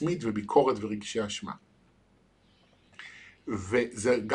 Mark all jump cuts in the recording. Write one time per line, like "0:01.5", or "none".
none